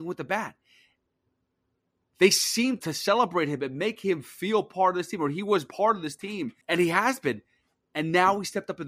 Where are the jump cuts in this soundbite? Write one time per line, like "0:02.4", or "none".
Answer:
0:02.8
0:06.6